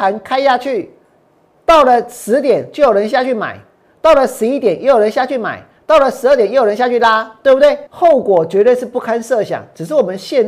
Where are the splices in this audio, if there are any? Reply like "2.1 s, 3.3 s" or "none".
7.9 s